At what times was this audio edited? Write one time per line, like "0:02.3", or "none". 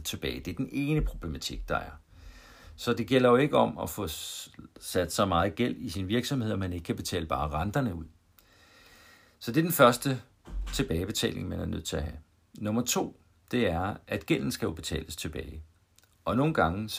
none